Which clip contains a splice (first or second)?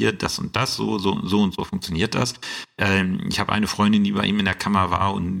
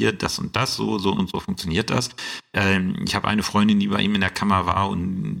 second